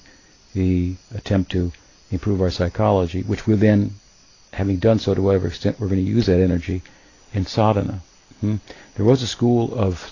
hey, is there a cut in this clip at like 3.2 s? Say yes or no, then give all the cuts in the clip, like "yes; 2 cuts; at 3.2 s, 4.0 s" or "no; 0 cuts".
no; 0 cuts